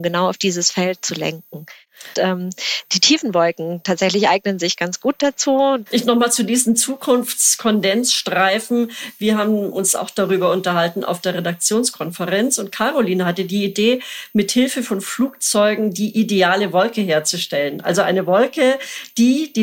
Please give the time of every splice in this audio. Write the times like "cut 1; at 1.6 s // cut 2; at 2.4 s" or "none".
cut 1; at 2.1 s // cut 2; at 5.9 s